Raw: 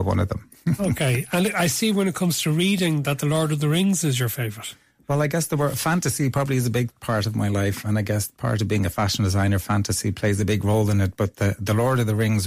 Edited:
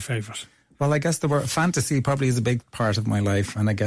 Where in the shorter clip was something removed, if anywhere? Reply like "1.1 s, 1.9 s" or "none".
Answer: none